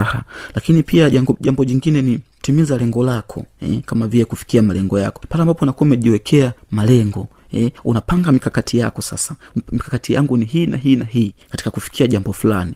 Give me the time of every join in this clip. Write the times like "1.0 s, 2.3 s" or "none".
none